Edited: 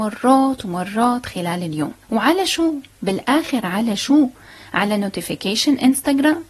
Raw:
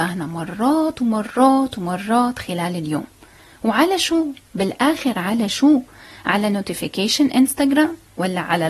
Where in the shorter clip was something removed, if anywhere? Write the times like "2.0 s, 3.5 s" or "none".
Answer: 2.0 s